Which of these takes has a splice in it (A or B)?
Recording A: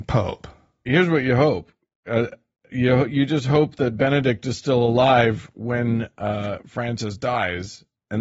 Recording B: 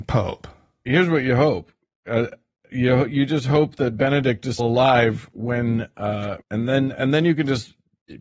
B